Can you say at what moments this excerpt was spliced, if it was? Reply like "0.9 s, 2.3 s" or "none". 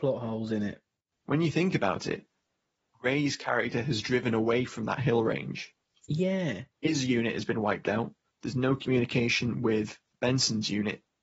6.7 s

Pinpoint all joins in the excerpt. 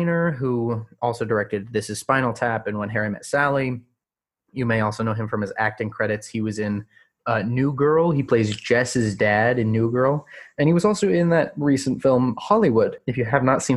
none

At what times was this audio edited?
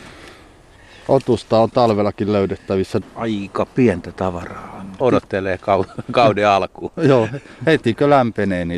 3.0 s, 5.0 s

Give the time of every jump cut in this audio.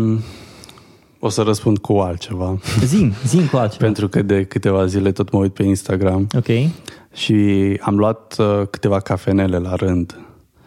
none

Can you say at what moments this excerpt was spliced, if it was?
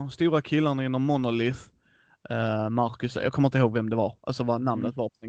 none

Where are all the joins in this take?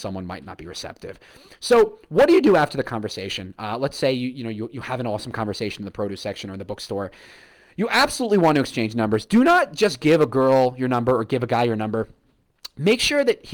none

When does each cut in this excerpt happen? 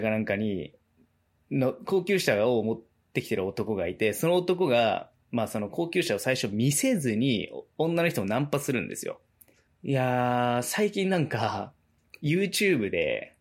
9.7 s

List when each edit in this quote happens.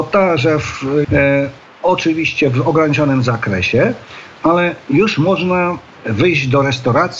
1.0 s

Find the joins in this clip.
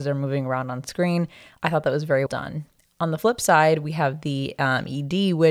2.3 s

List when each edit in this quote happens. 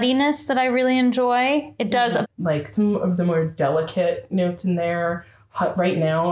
2.2 s

